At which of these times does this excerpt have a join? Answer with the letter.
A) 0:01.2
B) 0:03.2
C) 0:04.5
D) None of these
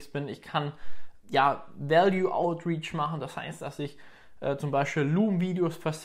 A